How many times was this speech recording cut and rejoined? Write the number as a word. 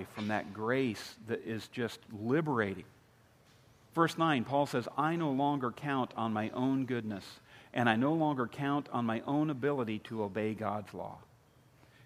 zero